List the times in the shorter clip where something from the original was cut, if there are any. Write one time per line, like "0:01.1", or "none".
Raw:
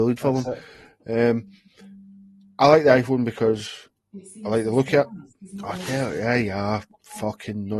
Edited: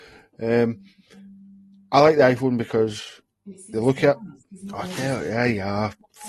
0:03.7